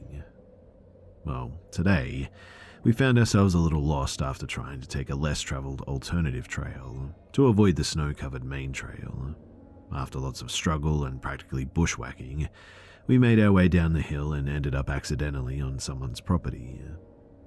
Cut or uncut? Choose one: uncut